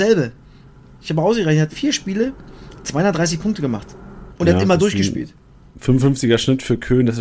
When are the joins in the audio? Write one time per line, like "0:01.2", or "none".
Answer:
0:01.7
0:04.3